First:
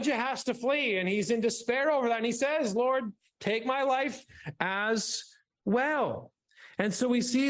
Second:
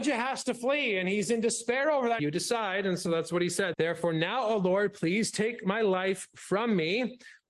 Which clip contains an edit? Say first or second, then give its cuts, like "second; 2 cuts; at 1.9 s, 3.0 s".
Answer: second; 2 cuts; at 2.2 s, 3.7 s